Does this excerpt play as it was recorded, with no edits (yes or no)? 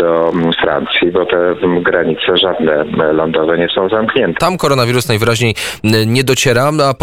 no